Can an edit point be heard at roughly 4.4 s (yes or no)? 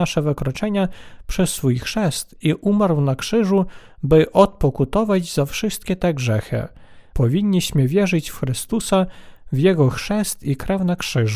no